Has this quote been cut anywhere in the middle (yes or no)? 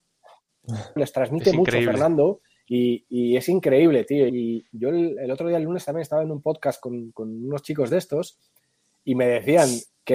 yes